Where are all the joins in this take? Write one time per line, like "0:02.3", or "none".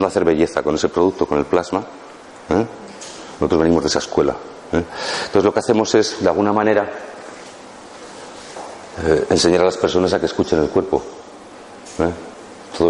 none